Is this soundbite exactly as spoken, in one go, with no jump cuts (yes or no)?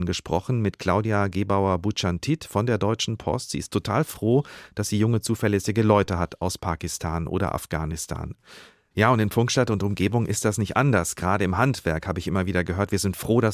no